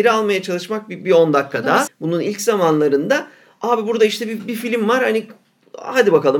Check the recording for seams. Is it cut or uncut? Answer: cut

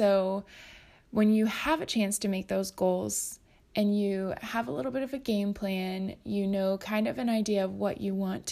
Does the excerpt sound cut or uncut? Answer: uncut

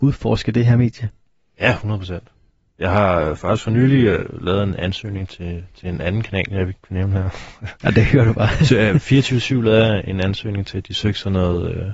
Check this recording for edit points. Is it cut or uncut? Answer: uncut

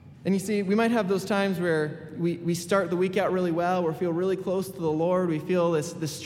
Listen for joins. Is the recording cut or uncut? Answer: uncut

